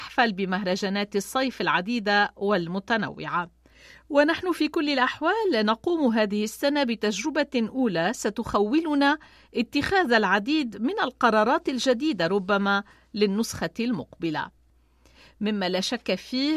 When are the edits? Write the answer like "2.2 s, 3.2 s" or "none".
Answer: none